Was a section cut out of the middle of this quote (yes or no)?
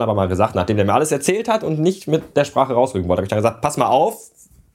no